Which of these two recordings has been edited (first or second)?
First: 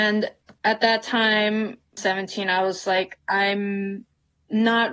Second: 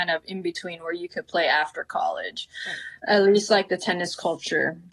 first